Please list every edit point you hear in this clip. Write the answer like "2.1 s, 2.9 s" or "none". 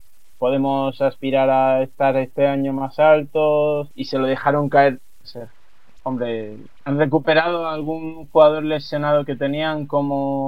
3.9 s, 5.2 s, 6.8 s